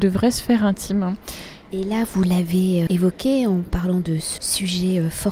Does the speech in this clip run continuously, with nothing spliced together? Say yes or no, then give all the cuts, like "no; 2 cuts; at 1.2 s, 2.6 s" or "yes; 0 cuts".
no; 3 cuts; at 1.7 s, 2.9 s, 4.4 s